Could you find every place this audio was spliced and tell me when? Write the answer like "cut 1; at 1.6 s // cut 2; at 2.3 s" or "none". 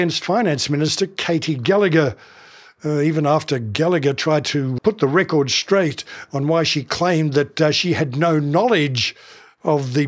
cut 1; at 4.8 s